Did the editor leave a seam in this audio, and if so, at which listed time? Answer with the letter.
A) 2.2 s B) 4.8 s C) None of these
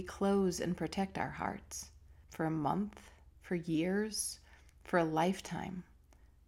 A